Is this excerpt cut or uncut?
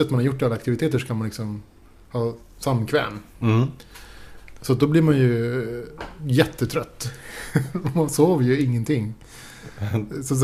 uncut